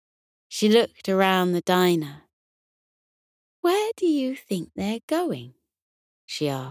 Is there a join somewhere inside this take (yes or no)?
no